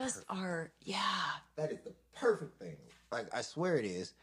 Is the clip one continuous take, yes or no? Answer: no